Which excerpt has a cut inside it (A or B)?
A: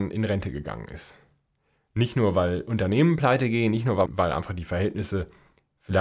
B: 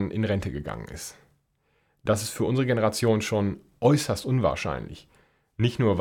A